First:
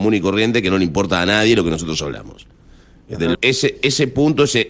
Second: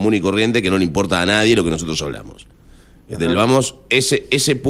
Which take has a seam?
first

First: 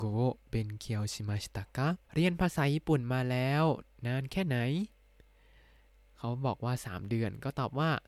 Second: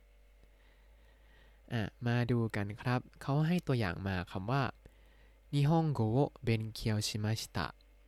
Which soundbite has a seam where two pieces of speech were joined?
first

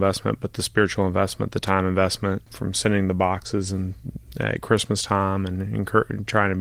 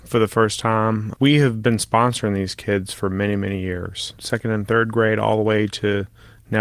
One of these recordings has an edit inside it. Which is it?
second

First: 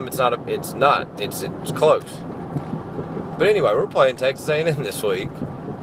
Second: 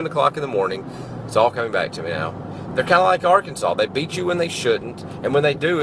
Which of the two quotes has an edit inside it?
second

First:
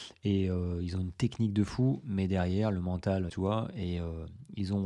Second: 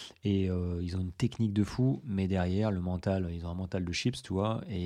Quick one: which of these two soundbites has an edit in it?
first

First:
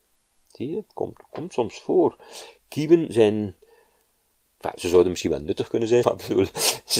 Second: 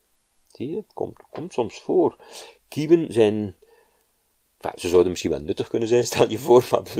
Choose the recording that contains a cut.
first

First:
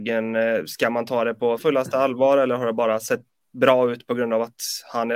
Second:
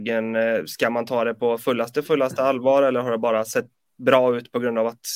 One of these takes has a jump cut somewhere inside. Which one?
first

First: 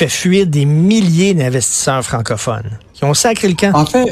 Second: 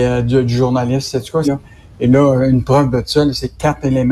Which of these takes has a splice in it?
second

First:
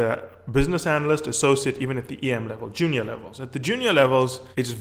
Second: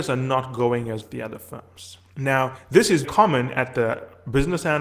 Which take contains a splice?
second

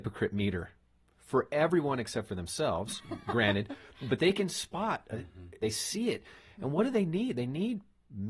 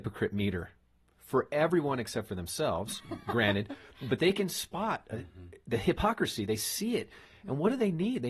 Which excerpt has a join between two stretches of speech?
first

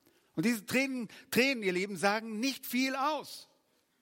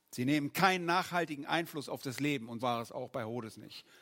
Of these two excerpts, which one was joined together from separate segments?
second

